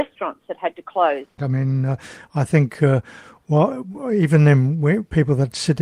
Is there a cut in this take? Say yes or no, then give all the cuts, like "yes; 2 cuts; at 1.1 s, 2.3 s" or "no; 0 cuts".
yes; 1 cut; at 1.4 s